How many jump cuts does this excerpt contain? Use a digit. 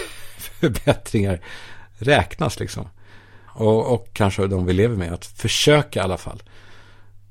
1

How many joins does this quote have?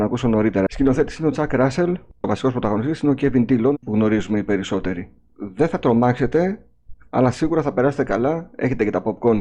3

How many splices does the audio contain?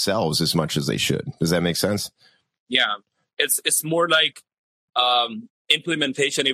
0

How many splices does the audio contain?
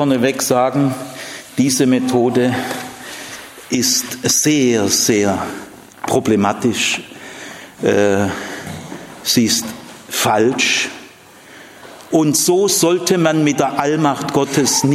1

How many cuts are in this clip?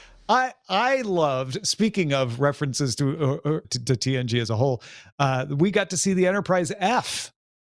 1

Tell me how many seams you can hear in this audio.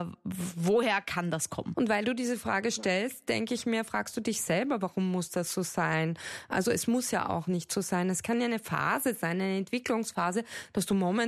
1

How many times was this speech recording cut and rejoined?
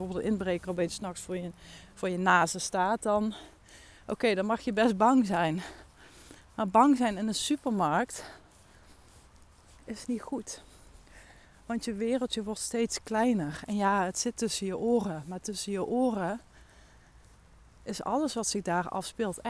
0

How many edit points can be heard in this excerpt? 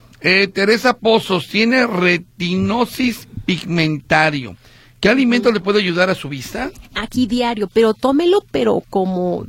0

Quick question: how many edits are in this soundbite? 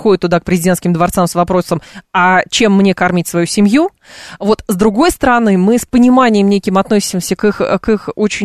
0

